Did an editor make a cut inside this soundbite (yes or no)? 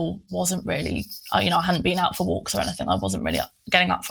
no